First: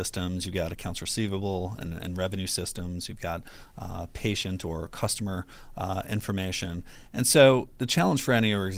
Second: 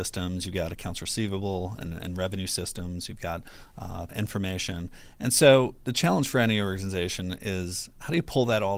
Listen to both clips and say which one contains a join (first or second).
second